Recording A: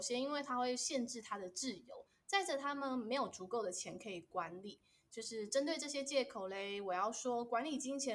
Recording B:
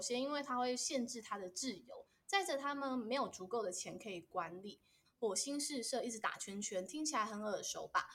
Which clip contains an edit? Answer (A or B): B